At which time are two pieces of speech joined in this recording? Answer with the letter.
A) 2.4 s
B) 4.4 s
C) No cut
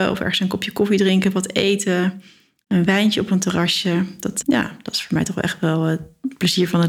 B